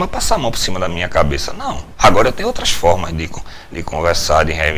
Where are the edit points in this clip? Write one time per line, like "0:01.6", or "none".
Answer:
none